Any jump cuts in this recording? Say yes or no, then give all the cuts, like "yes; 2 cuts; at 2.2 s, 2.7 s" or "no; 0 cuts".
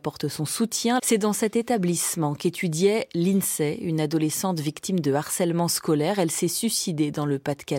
yes; 1 cut; at 1.0 s